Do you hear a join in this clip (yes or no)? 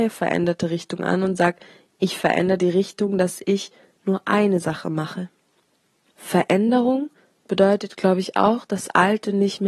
yes